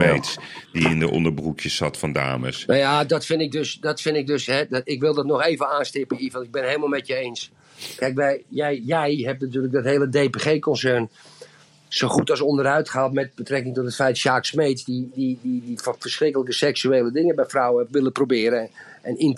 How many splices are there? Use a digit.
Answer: 0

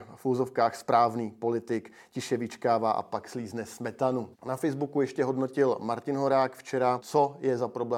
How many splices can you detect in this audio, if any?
2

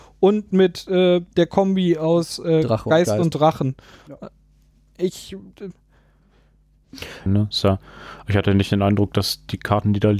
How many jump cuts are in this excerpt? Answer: 1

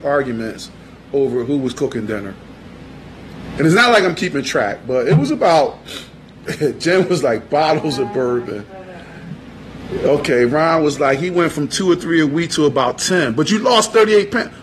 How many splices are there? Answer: 0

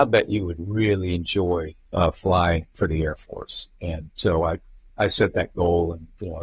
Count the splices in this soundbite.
0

